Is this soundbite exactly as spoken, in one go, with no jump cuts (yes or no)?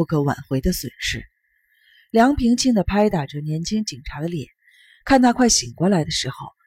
no